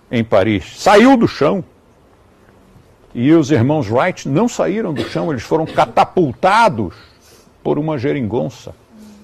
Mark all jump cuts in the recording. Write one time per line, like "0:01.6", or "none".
none